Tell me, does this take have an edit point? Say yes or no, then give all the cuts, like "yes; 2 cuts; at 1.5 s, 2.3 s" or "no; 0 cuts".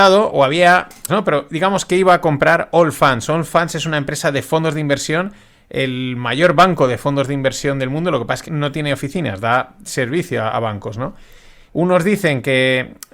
yes; 3 cuts; at 1.1 s, 8.4 s, 11.7 s